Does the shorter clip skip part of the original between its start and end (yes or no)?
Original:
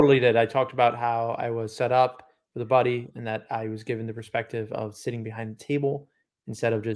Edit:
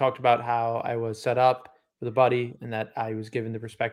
no